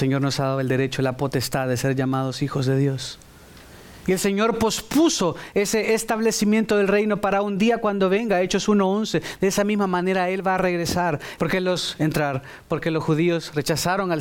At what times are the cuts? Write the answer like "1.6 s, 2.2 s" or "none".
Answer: 9.4 s, 11.4 s